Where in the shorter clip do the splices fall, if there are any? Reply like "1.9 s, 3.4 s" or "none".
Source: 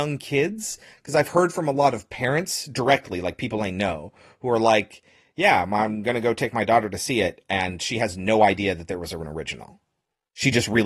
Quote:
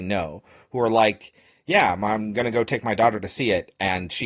none